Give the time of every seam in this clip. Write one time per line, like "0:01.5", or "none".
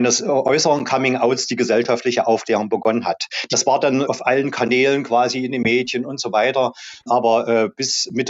none